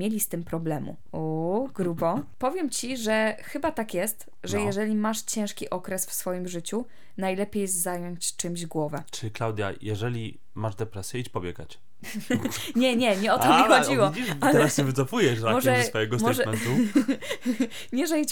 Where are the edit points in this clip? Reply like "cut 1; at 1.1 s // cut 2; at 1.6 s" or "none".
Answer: cut 1; at 1.1 s